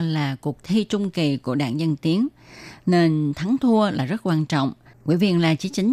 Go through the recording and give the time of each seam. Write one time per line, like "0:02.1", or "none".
none